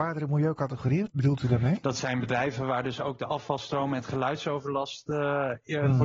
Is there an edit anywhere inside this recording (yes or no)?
no